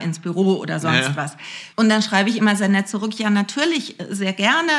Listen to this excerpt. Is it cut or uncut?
cut